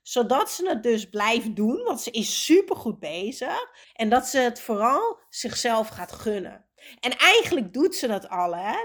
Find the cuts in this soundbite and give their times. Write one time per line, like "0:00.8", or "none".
0:03.8